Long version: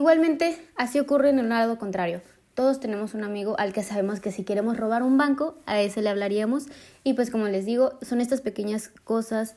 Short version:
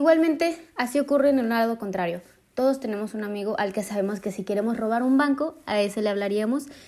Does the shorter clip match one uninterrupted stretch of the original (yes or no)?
yes